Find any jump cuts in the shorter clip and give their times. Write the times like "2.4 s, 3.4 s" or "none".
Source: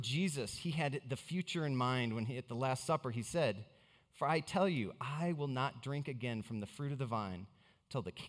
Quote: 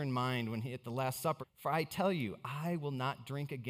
1.4 s